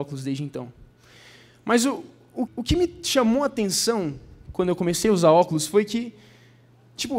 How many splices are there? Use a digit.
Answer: 1